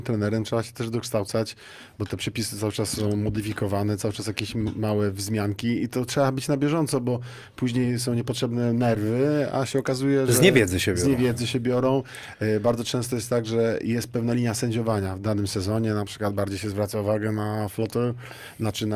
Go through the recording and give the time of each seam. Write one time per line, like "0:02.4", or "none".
none